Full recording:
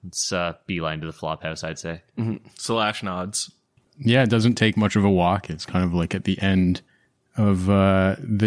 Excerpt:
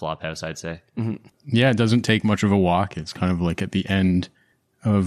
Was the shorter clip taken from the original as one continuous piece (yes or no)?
no